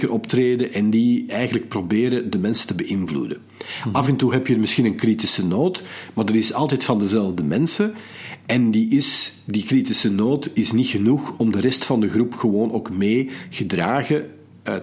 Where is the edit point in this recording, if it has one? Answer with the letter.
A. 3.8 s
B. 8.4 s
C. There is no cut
C